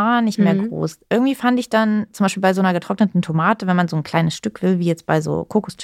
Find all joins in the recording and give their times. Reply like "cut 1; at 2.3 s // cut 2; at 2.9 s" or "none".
none